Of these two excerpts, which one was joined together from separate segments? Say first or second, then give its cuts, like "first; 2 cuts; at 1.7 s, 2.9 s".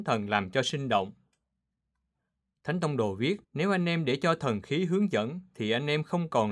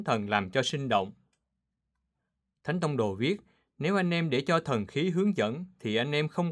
first; 1 cut; at 3.4 s